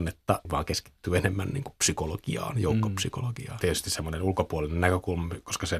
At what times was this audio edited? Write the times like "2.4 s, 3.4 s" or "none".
3.6 s